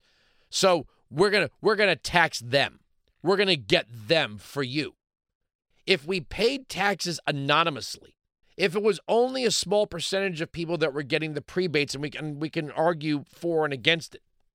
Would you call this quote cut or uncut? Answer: cut